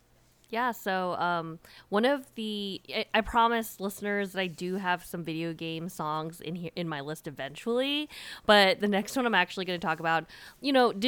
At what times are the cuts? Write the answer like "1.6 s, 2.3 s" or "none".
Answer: none